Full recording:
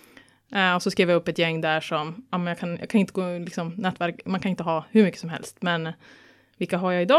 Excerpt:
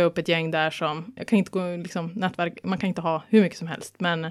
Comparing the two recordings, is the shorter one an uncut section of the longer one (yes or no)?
no